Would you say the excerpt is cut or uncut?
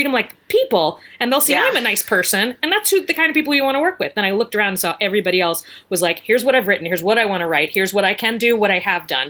uncut